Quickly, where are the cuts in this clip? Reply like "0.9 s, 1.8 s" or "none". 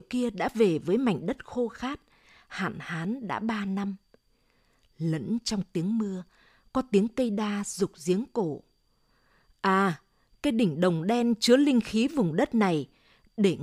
none